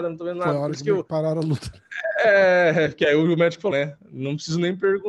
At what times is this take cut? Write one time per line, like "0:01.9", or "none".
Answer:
0:03.7